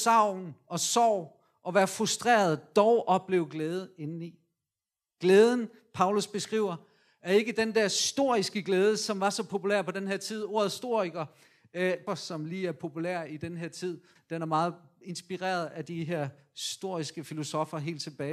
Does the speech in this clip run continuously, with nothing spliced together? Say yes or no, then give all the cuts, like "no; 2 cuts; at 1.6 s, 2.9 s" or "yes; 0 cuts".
no; 2 cuts; at 12.1 s, 14.2 s